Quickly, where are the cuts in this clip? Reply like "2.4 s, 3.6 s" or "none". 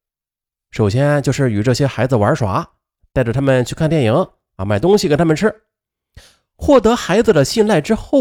4.6 s